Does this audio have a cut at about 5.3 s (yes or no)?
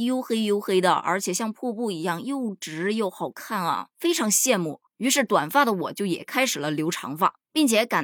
no